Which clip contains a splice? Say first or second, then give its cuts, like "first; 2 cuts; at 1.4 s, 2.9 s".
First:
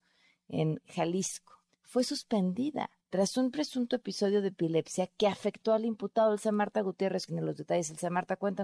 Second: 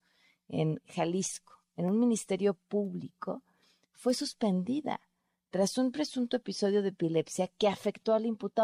first; 3 cuts; at 1.7 s, 3.0 s, 7.3 s